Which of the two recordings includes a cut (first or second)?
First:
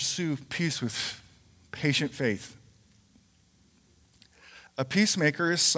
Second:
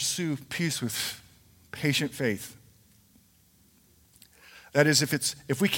first